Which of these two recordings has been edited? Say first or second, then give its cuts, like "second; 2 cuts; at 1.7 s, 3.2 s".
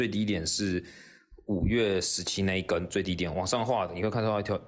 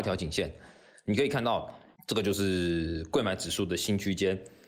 second; 1 cut; at 2.0 s